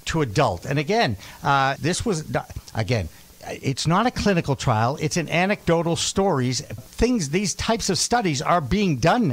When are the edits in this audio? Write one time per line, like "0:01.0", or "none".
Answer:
0:01.8
0:06.8